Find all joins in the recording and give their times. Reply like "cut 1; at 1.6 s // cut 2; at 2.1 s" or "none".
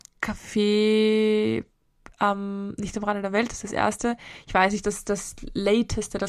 cut 1; at 4.8 s